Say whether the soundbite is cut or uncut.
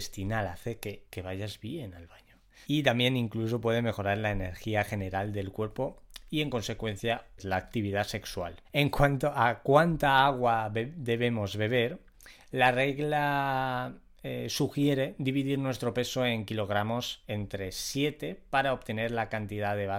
uncut